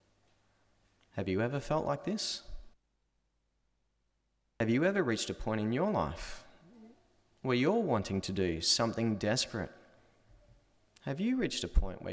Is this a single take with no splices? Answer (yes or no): yes